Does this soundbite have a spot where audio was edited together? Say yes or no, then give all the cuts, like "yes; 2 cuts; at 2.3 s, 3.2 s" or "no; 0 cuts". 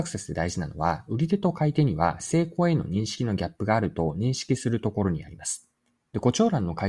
yes; 1 cut; at 6.0 s